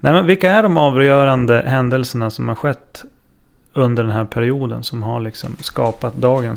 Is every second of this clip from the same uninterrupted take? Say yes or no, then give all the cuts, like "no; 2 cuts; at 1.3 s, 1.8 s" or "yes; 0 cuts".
yes; 0 cuts